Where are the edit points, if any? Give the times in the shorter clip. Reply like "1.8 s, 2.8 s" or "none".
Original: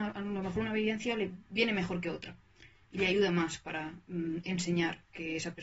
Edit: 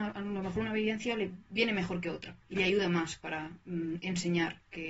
2.4 s